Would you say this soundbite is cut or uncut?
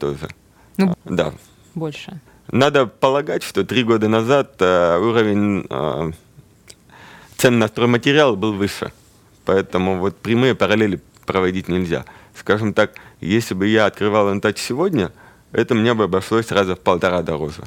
cut